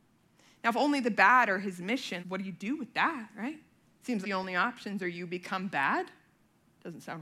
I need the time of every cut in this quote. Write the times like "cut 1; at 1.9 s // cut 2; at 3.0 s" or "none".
cut 1; at 2.2 s // cut 2; at 4.2 s